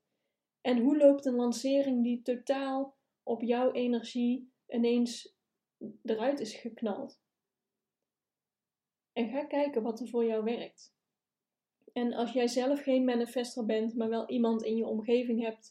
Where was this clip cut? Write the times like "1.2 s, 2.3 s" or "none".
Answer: none